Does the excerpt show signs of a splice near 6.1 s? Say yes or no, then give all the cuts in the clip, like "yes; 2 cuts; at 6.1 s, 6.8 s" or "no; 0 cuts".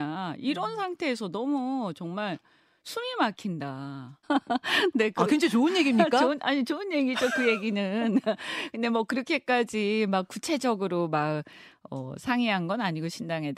no; 1 cut; at 4.2 s